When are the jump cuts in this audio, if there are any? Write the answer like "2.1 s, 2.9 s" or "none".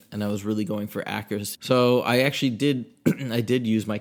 1.5 s